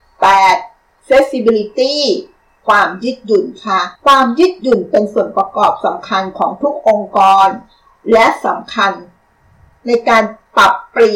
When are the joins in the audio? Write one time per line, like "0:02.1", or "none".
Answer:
0:01.0
0:04.0

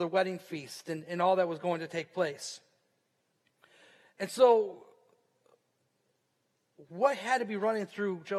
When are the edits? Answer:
none

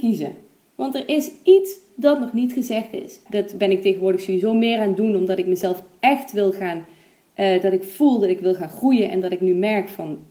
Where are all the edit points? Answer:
0:03.3

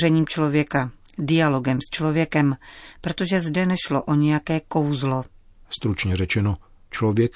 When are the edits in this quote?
0:05.6

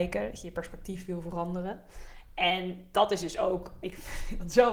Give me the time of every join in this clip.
0:03.8

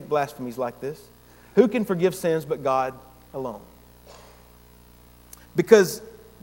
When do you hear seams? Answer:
0:05.4

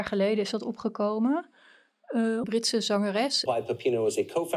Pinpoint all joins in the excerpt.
0:02.4
0:03.5

